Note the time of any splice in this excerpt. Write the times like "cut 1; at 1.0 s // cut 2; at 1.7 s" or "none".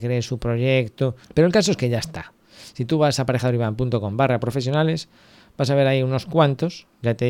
cut 1; at 1.2 s